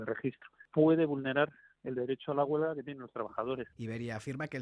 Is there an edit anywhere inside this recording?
yes; 1 cut; at 3.7 s

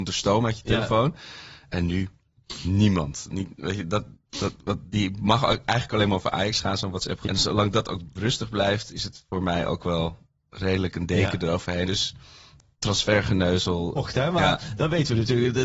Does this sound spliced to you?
yes; 3 cuts; at 7.2 s, 11.9 s, 14.0 s

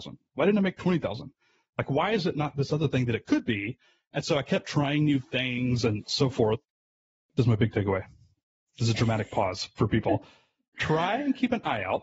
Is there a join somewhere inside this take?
no; 0 cuts

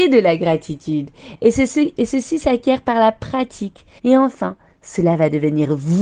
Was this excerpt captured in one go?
no; 1 cut; at 4.0 s

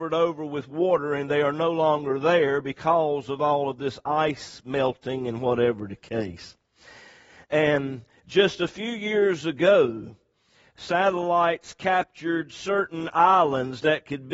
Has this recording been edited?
yes; 1 cut; at 7.4 s

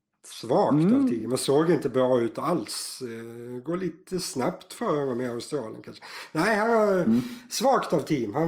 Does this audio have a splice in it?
no; 0 cuts

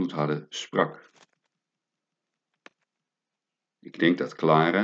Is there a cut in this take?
no; 0 cuts

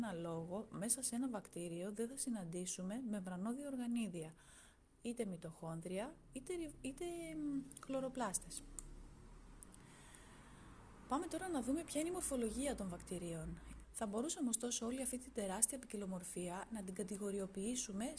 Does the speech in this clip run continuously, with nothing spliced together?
no; 1 cut; at 13.8 s

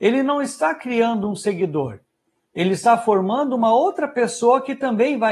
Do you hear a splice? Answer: no; 0 cuts

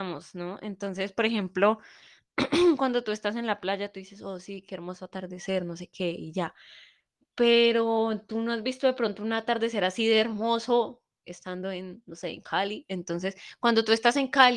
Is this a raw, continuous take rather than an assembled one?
no; 1 cut; at 11.2 s

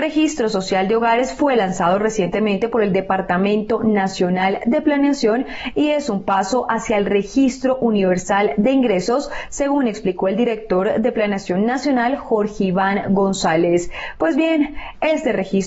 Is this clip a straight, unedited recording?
yes; 0 cuts

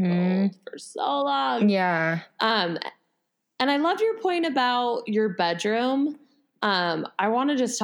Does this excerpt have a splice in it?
no; 0 cuts

